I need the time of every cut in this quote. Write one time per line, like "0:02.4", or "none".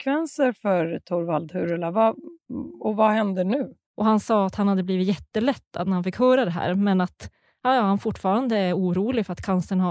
0:03.9